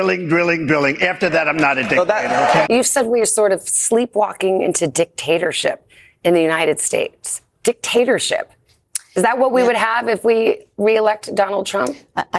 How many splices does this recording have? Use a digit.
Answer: 1